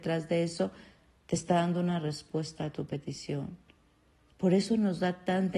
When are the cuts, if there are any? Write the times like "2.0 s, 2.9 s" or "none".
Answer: 4.3 s

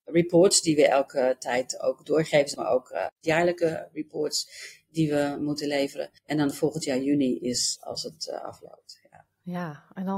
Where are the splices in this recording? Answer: 2.5 s, 6.2 s

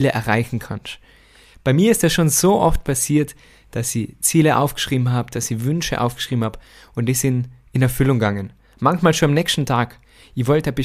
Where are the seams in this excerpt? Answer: none

